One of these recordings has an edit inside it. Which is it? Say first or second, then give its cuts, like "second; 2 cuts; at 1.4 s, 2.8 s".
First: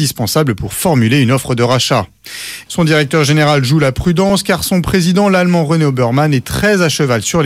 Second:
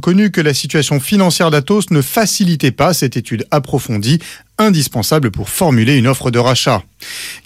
first; 1 cut; at 2.7 s